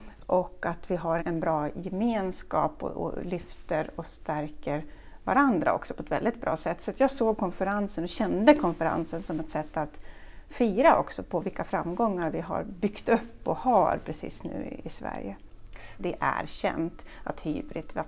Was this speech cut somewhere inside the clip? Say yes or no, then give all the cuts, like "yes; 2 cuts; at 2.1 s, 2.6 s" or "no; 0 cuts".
yes; 2 cuts; at 1.2 s, 16.0 s